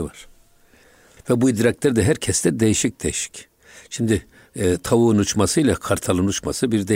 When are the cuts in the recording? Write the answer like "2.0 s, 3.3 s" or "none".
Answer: 1.2 s